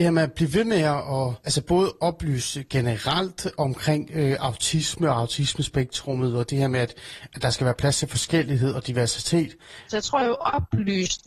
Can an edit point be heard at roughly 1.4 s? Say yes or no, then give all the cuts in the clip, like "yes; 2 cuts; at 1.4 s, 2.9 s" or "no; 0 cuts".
yes; 2 cuts; at 1.4 s, 9.9 s